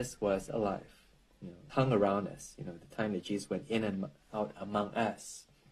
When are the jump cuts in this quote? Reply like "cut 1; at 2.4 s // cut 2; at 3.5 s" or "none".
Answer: cut 1; at 1.7 s // cut 2; at 4.2 s